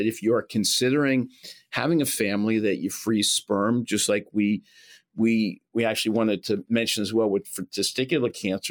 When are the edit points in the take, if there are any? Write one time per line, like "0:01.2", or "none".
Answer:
none